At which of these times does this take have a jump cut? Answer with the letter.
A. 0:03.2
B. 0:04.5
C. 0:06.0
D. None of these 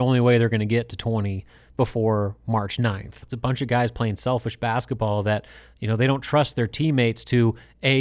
A